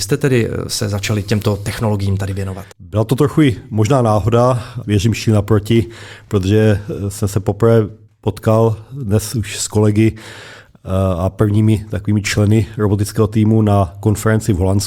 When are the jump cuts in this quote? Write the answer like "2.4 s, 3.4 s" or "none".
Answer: 2.7 s, 4.8 s